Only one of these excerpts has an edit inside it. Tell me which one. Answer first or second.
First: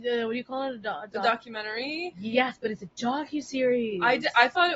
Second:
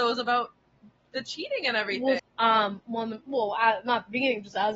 second